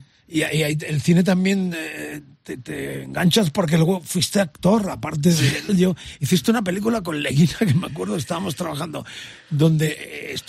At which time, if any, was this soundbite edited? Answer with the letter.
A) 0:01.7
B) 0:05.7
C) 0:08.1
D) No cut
B